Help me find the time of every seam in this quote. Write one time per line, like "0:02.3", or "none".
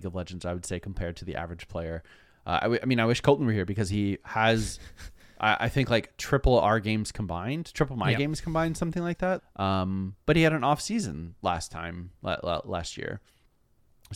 0:09.4

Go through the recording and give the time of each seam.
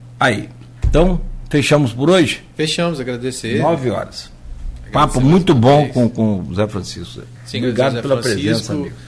none

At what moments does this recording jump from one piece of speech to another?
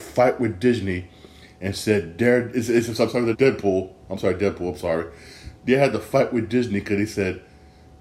0:03.3

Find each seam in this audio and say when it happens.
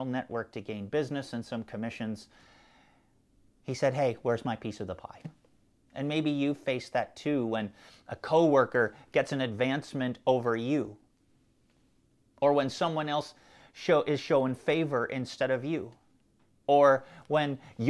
none

